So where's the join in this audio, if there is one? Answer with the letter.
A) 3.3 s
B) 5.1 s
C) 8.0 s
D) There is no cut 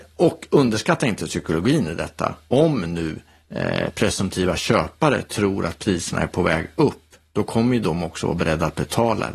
D